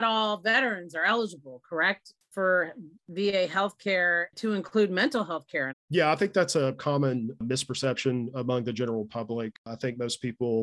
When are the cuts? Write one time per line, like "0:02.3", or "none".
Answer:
0:05.7